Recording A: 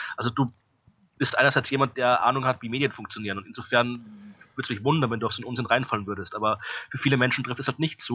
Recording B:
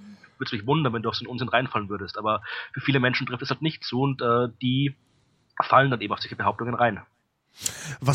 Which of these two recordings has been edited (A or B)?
A